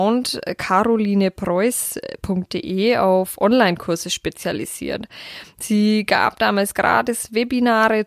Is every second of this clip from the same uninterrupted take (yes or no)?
yes